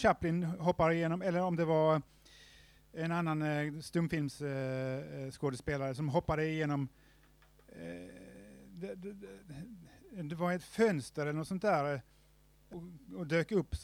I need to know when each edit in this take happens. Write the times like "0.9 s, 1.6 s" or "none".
12.7 s